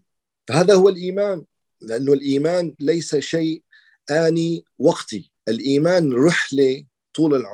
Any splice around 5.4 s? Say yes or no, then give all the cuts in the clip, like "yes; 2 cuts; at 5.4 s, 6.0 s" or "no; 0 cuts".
yes; 2 cuts; at 2.7 s, 5.4 s